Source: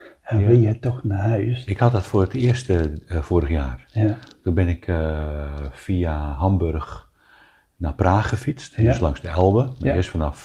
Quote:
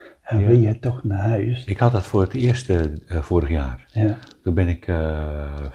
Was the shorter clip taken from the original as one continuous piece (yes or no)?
yes